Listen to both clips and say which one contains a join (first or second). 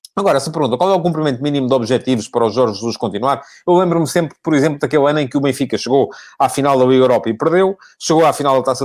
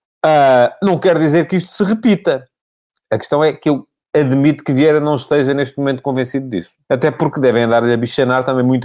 second